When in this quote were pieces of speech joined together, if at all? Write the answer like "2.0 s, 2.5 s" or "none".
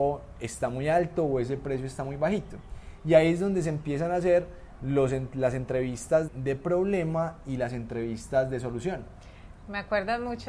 6.3 s